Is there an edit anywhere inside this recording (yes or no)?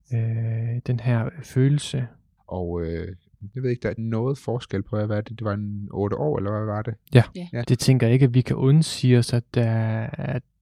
yes